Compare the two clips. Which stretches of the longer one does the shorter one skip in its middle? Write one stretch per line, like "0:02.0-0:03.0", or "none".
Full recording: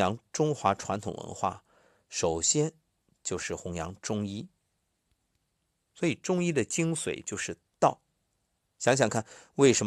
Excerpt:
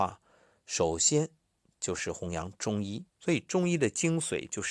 0:04.5-0:05.8